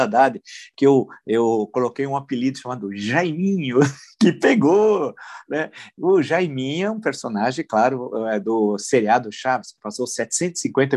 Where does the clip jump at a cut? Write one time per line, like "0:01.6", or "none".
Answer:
none